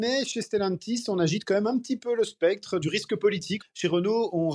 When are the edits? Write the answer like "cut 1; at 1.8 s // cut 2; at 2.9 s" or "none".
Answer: cut 1; at 3.6 s

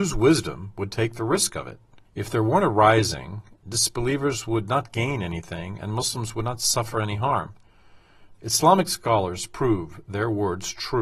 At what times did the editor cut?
cut 1; at 2.0 s // cut 2; at 8.3 s

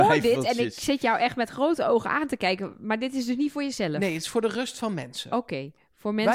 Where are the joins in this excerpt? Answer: none

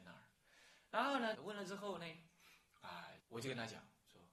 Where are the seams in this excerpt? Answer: cut 1; at 1.3 s // cut 2; at 3.2 s

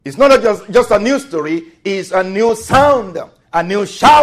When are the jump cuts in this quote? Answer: none

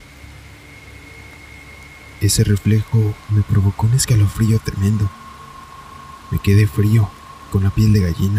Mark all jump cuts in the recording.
cut 1; at 3.2 s

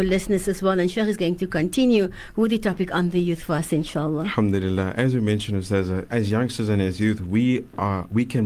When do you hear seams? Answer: cut 1; at 6.1 s

